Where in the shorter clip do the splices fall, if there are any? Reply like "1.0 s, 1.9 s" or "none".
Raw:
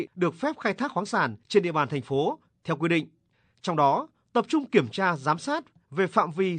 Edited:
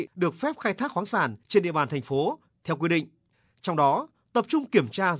none